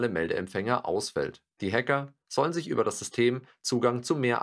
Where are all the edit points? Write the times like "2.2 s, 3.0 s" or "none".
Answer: 1.5 s